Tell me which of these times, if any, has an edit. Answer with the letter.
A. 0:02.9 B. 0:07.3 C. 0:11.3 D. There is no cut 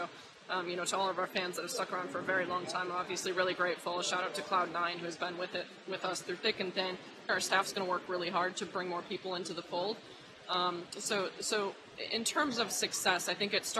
B